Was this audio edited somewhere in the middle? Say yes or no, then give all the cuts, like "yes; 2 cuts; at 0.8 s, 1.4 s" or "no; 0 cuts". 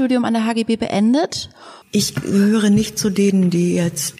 yes; 1 cut; at 1.8 s